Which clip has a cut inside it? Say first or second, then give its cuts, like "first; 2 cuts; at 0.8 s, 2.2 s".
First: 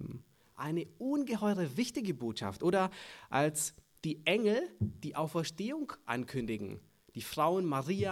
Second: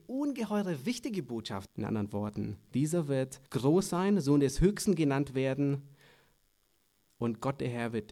second; 2 cuts; at 1.7 s, 3.5 s